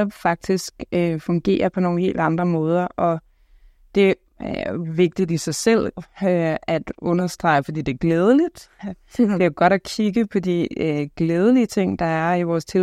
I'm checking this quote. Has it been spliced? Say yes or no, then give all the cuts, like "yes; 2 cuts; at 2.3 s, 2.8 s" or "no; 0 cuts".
no; 0 cuts